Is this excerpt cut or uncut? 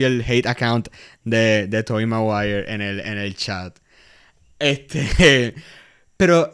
uncut